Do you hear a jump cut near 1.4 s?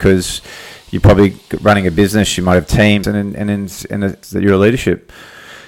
no; 2 cuts; at 3.0 s, 4.2 s

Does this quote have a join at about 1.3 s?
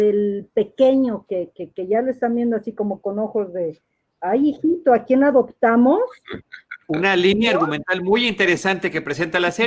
no; 0 cuts

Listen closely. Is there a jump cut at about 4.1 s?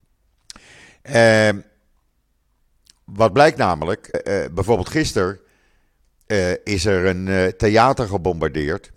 yes; 1 cut; at 4.1 s

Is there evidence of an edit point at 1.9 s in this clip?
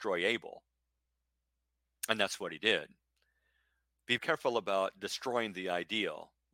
no; 1 cut; at 4.2 s

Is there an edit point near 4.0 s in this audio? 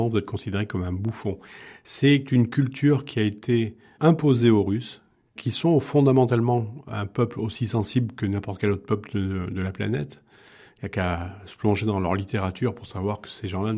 yes; 1 cut; at 4.0 s

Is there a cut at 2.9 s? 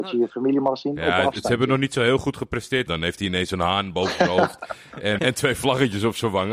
yes; 2 cuts; at 2.9 s, 5.2 s

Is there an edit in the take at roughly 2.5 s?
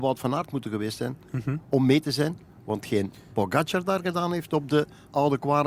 no; 0 cuts

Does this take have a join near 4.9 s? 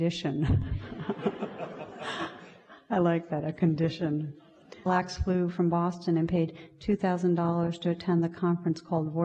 yes; 1 cut; at 4.9 s

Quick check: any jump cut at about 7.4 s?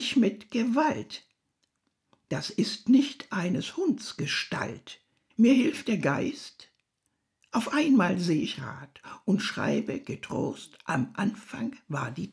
no; 1 cut; at 5.3 s

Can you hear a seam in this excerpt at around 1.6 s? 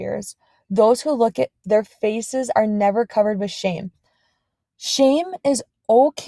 yes; 1 cut; at 1.6 s

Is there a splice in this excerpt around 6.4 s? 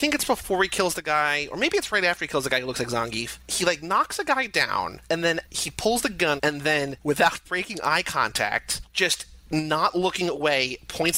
yes; 1 cut; at 6.4 s

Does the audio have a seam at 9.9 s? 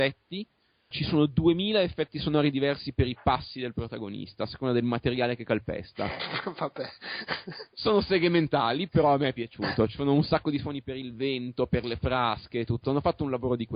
no; 1 cut; at 0.9 s

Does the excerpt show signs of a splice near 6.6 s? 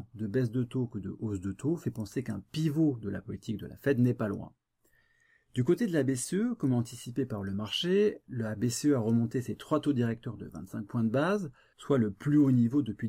no; 1 cut; at 11.7 s

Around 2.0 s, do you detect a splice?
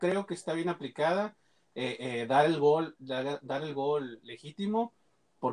no; 0 cuts

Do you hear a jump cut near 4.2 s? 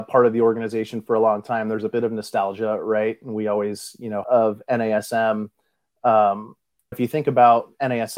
yes; 2 cuts; at 4.2 s, 6.9 s

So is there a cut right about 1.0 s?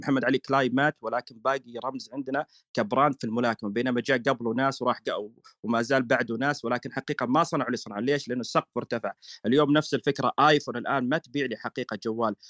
no; 0 cuts

